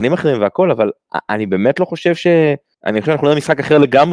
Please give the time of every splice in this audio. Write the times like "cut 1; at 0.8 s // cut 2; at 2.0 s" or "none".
cut 1; at 2.7 s